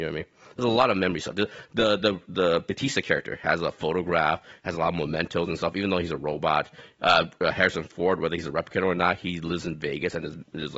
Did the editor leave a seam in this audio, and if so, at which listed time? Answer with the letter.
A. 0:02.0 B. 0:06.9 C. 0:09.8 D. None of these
D